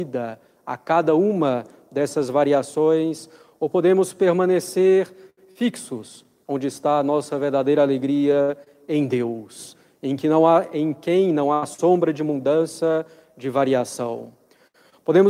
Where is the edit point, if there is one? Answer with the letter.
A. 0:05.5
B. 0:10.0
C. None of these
C